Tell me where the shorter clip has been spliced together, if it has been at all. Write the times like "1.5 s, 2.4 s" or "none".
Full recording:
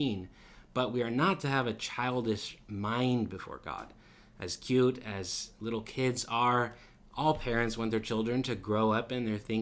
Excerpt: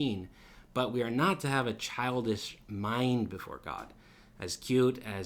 none